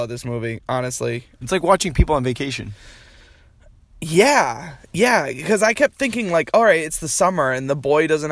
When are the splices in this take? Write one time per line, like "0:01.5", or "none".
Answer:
0:01.4